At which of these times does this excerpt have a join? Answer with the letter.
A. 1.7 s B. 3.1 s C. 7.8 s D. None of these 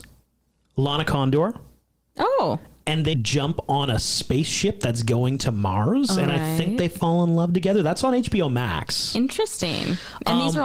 B